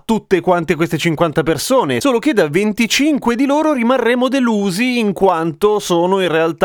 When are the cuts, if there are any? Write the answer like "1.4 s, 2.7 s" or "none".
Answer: none